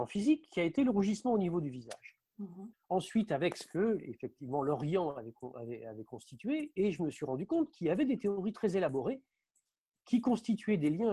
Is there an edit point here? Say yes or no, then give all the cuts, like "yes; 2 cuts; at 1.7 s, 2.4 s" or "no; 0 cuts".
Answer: yes; 1 cut; at 2.7 s